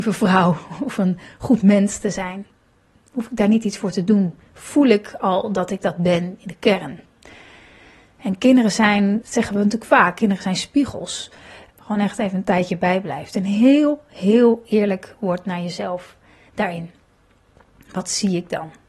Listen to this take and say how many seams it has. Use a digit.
2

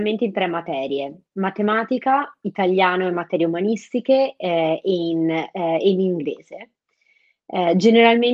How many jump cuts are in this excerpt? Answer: 0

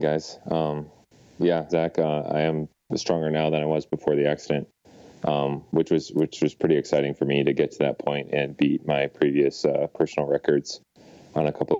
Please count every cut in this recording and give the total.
1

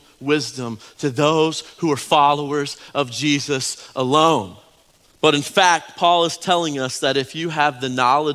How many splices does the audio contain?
1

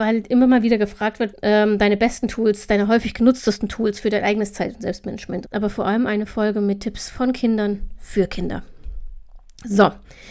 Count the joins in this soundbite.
2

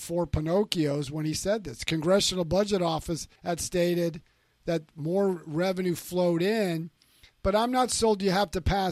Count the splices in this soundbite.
1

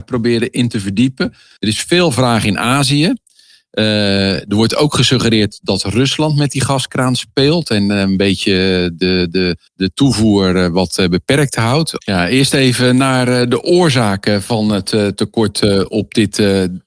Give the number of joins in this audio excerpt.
3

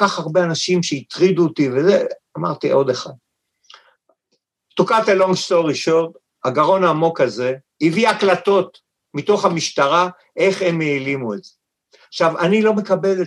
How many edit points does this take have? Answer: 0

